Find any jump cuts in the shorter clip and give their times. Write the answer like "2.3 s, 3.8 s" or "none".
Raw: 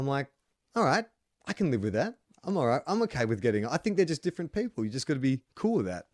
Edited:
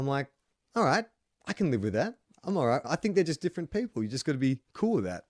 2.8 s